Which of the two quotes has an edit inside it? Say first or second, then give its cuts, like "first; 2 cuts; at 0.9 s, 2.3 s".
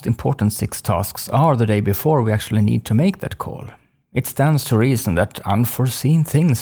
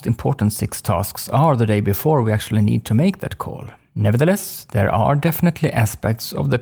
second; 1 cut; at 3.9 s